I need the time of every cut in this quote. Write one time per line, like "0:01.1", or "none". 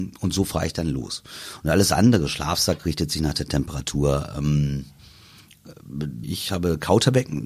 0:06.2